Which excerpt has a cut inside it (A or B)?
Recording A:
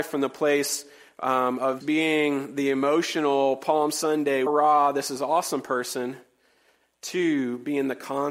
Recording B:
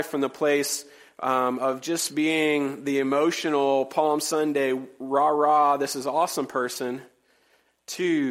A